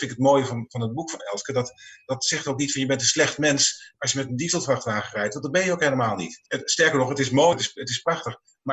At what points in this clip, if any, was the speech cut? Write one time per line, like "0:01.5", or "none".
0:06.5
0:07.5

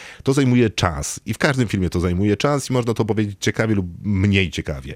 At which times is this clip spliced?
none

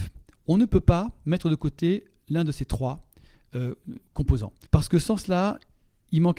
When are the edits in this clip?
0:04.7

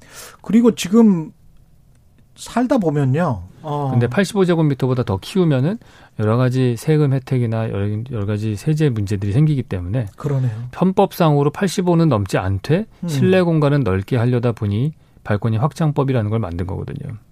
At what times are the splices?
0:03.5

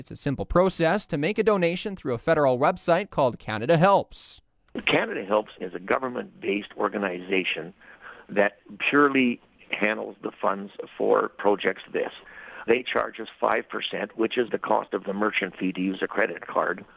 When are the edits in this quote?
0:11.9
0:14.5

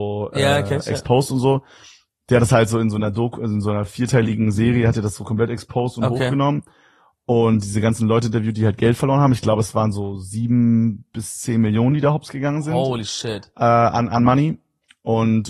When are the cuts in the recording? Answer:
none

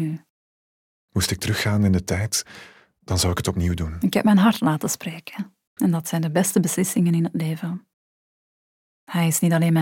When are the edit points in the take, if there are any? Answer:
0:05.8

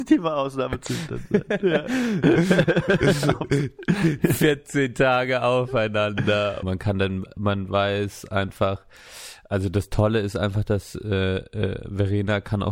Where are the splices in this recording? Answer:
0:06.6

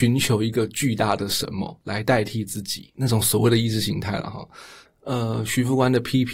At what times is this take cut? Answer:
0:04.9

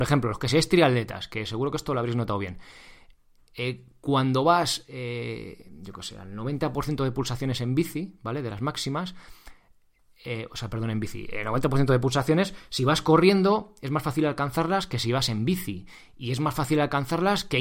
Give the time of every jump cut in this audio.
none

